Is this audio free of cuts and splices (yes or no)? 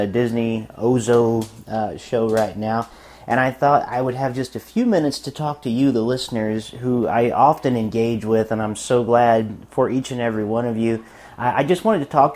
yes